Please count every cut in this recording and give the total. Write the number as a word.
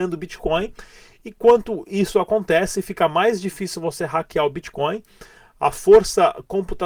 zero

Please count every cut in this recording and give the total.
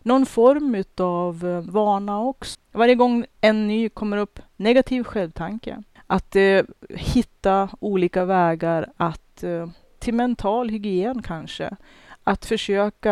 two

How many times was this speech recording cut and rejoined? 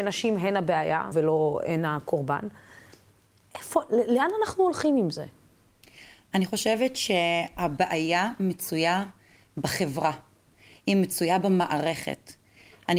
one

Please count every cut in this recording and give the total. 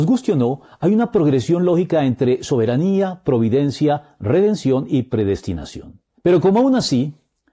one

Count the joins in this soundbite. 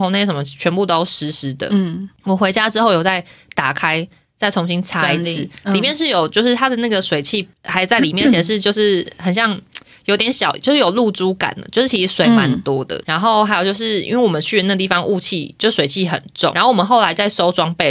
two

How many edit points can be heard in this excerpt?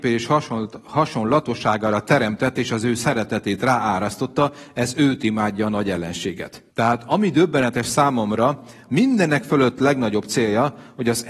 two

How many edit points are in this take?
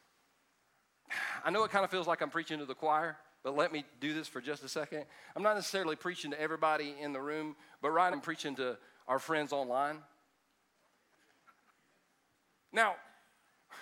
two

